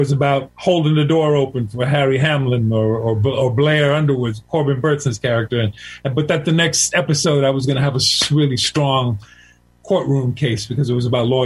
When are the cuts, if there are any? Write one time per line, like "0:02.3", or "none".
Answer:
none